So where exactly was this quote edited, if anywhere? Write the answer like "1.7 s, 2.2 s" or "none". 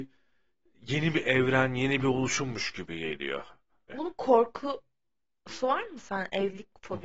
3.9 s